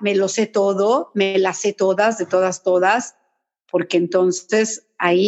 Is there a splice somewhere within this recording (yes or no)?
no